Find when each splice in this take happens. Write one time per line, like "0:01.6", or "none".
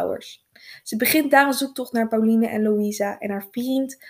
none